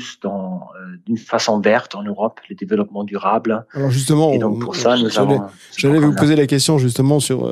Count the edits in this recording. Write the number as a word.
zero